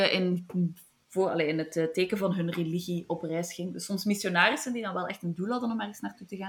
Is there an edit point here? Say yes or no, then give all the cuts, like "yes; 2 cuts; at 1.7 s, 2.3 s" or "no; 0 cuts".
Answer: no; 0 cuts